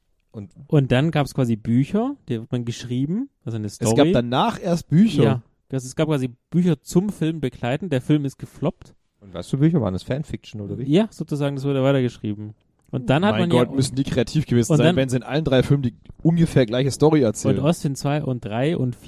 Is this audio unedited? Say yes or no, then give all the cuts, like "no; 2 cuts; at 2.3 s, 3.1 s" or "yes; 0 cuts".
yes; 0 cuts